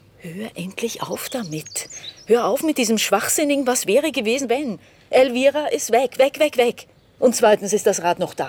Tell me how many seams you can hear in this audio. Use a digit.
1